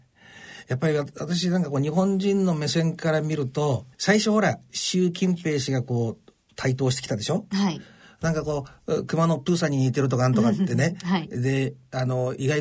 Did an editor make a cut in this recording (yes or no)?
yes